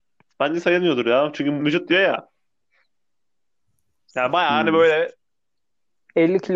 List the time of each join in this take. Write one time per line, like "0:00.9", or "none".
0:01.6